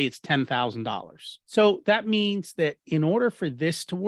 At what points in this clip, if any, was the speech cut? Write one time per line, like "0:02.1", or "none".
0:01.4